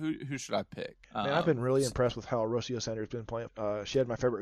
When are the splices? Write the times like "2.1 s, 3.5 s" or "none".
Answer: 1.0 s, 3.5 s